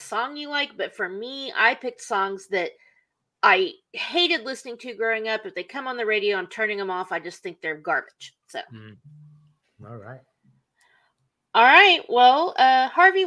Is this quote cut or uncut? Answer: uncut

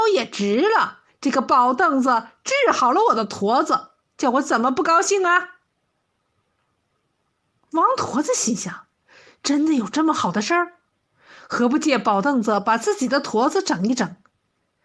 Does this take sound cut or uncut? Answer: uncut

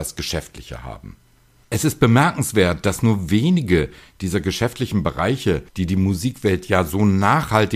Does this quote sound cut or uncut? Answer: cut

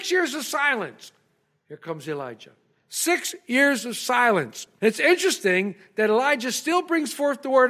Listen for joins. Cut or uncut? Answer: uncut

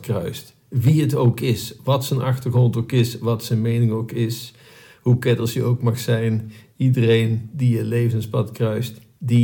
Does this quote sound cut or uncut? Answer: uncut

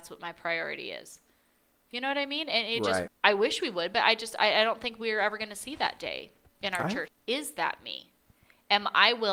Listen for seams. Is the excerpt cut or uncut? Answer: cut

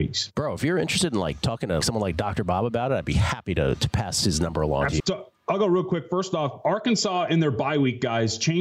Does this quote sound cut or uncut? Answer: cut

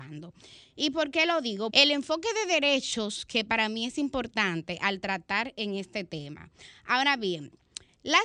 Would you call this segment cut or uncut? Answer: cut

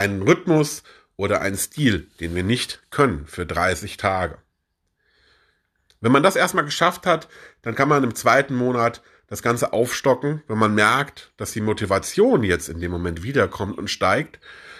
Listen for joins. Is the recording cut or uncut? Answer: uncut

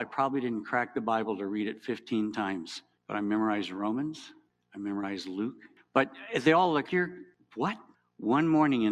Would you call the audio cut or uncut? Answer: cut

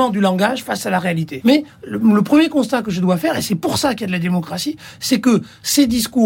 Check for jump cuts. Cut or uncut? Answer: cut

